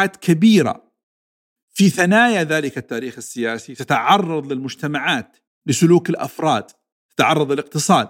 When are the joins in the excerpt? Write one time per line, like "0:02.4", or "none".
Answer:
none